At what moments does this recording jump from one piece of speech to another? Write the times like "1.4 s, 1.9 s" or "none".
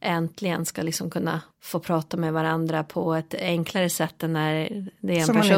1.5 s